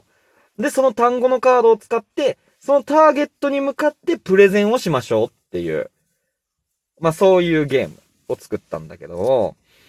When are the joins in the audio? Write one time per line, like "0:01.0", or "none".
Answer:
none